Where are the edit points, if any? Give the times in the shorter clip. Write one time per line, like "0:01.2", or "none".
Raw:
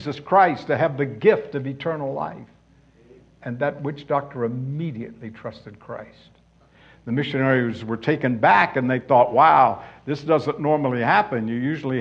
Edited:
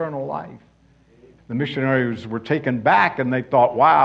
0:01.4